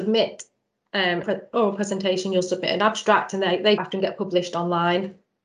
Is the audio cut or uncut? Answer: cut